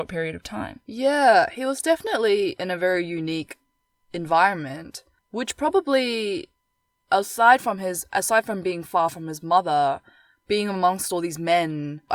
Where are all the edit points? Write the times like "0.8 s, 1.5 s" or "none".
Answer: none